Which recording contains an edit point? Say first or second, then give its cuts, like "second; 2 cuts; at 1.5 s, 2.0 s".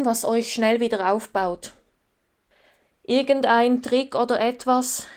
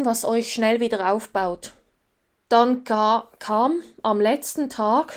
second; 1 cut; at 2.5 s